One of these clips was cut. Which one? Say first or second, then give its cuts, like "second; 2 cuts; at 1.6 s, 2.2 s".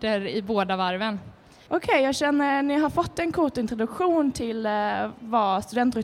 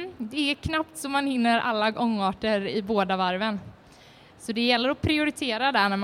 first; 1 cut; at 1.7 s